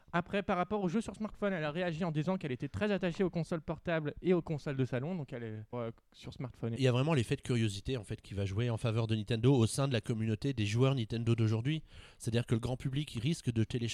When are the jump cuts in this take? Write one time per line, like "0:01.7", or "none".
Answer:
0:05.7
0:06.8